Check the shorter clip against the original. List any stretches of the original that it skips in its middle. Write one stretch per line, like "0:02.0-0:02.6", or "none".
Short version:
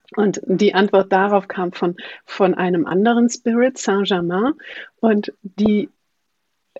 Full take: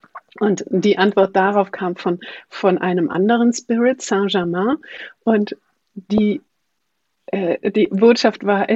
0:05.6-0:05.9